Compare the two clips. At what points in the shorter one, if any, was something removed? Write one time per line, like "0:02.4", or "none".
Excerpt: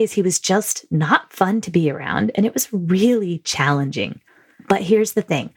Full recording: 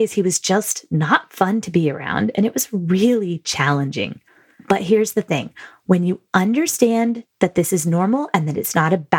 none